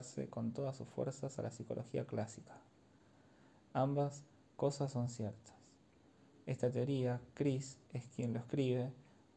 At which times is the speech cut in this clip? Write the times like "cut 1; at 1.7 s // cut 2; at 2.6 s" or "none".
none